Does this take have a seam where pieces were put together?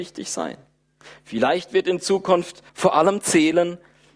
yes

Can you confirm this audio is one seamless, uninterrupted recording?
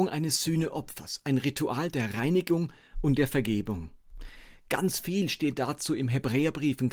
yes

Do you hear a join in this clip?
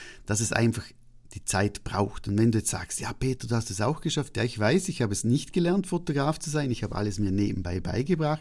no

